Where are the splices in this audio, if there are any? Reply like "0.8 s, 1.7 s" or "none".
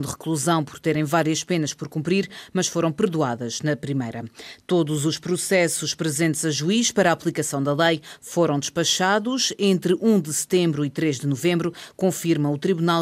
none